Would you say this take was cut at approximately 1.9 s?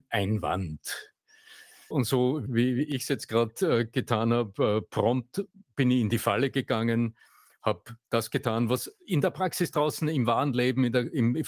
yes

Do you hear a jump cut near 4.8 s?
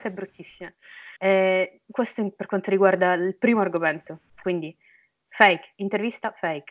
no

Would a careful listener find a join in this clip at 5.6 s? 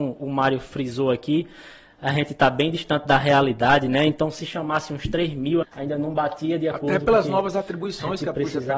yes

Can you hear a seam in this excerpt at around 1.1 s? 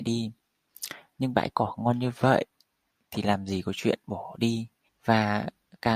no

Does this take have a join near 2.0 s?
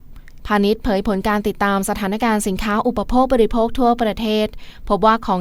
no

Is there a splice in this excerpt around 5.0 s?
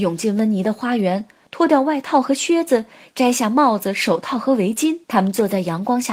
yes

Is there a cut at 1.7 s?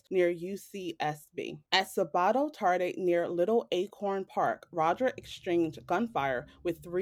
yes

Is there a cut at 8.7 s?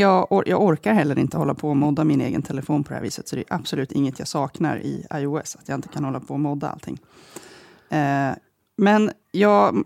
no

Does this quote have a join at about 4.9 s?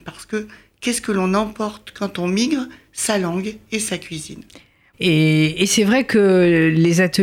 yes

